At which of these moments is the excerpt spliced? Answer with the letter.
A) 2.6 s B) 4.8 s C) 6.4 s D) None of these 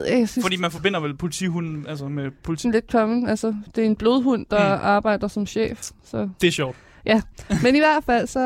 A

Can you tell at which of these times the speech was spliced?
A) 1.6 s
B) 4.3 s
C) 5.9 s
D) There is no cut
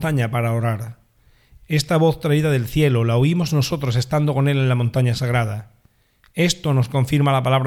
A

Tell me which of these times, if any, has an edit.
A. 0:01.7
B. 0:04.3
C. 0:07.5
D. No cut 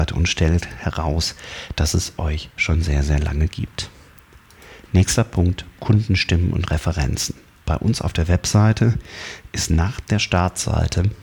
D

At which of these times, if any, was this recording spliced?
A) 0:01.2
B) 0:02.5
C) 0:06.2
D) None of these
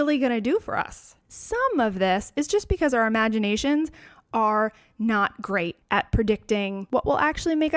A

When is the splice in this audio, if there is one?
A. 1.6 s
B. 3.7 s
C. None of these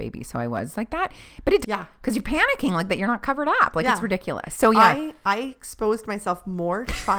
A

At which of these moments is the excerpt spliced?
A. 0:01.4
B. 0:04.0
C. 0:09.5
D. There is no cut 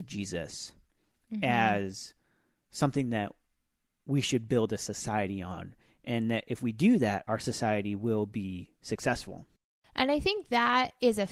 D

